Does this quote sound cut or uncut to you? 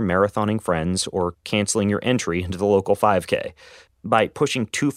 cut